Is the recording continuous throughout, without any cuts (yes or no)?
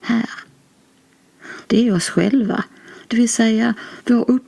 no